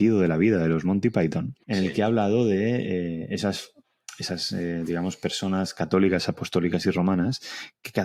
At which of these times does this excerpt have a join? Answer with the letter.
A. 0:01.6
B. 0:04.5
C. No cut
A